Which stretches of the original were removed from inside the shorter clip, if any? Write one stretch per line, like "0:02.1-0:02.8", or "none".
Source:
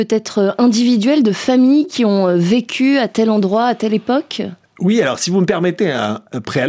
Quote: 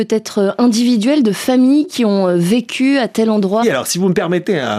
0:03.6-0:04.9